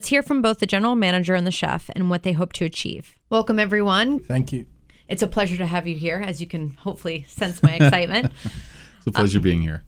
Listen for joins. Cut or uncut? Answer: cut